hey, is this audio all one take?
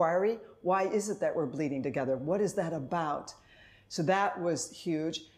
yes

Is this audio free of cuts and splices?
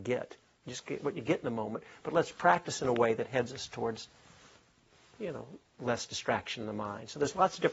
yes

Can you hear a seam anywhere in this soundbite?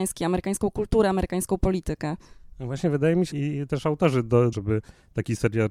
yes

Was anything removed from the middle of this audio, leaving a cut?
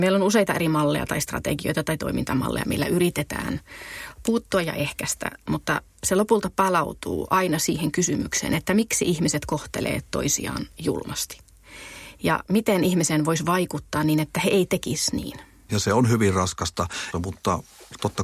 yes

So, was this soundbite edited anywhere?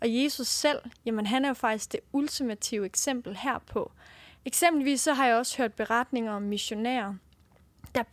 yes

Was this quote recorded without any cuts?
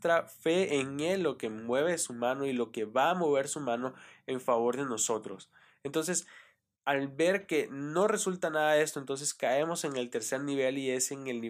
yes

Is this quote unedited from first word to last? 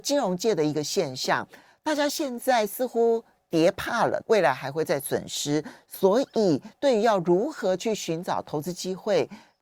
no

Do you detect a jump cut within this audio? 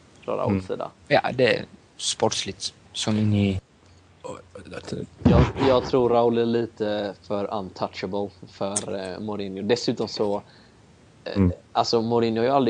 yes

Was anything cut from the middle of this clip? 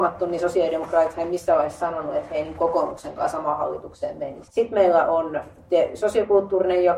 yes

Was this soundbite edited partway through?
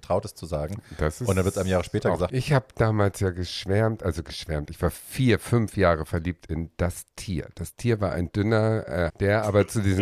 yes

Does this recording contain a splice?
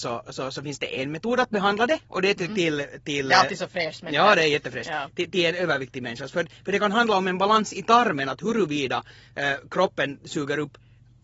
yes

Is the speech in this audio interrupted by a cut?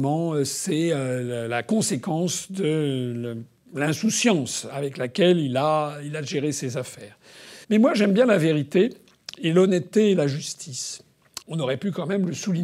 yes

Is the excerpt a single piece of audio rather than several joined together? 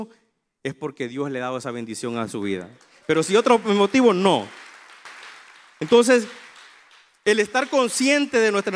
yes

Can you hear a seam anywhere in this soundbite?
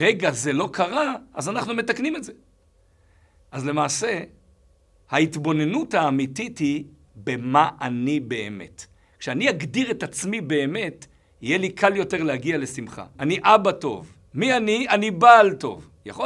yes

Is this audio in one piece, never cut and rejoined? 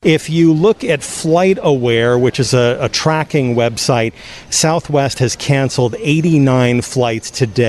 yes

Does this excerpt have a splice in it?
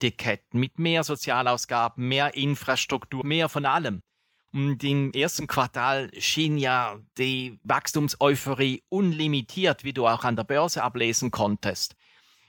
yes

